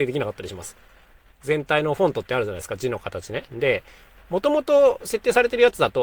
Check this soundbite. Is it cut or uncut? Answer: uncut